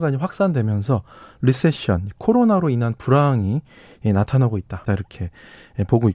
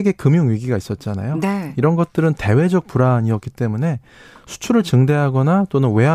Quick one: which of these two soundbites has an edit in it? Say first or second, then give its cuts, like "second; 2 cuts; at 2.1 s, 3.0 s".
first; 1 cut; at 4.9 s